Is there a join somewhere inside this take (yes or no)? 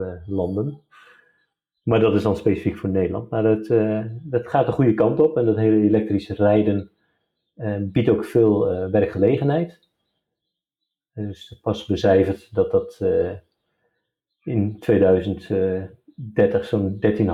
no